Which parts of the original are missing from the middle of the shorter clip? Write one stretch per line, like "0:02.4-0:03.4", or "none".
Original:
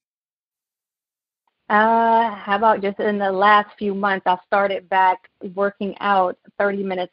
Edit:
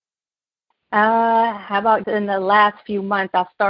0:02.8-0:03.0

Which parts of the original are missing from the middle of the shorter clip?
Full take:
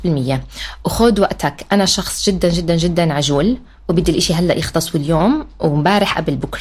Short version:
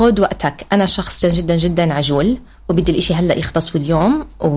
0:02.2-0:02.4

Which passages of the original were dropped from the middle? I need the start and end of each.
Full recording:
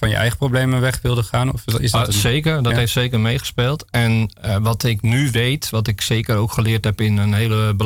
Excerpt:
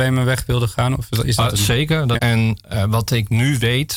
0:02.7-0:03.9

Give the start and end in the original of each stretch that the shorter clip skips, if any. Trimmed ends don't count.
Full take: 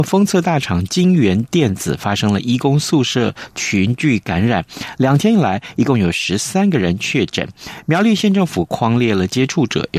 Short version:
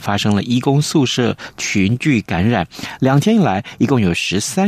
none

